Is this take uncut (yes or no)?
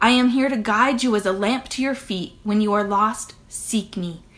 yes